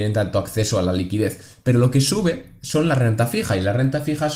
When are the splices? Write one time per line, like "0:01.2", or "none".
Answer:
none